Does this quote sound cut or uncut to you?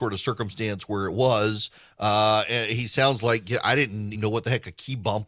cut